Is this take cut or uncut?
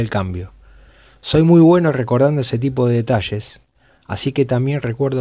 uncut